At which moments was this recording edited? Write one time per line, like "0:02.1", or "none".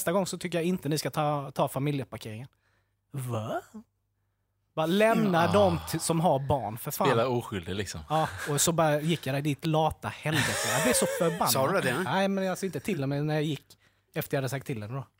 none